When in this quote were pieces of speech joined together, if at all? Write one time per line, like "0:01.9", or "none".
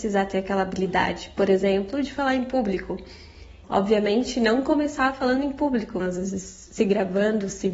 0:03.6
0:06.0